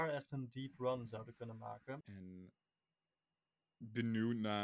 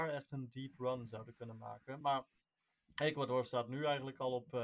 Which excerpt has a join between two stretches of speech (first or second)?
first